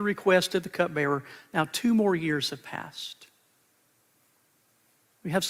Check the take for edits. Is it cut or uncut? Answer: uncut